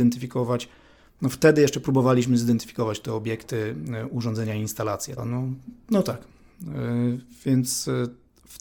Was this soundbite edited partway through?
yes; 1 cut; at 5.2 s

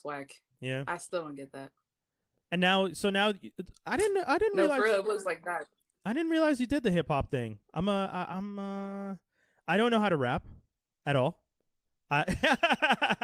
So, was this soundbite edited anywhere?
yes; 2 cuts; at 5.0 s, 8.3 s

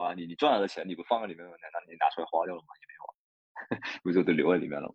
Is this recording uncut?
yes; 0 cuts

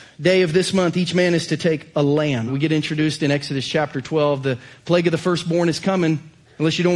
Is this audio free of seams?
no; 1 cut; at 2.5 s

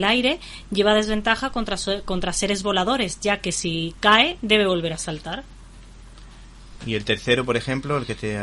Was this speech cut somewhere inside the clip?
no; 0 cuts

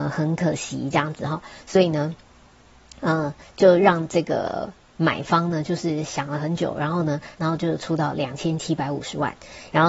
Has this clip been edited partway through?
yes; 1 cut; at 7.3 s

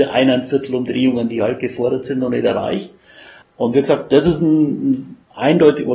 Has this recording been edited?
yes; 1 cut; at 3.4 s

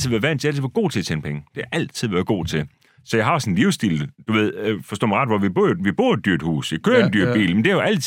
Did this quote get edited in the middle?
no; 0 cuts

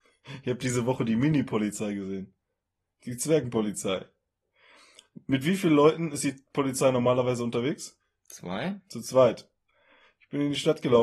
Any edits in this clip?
no; 0 cuts

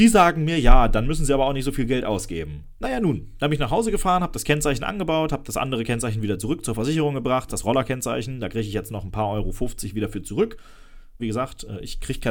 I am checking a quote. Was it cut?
yes; 3 cuts; at 2.8 s, 7.5 s, 11.2 s

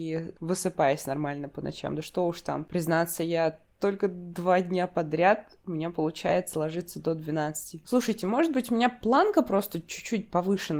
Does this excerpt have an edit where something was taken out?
yes; 1 cut; at 7.8 s

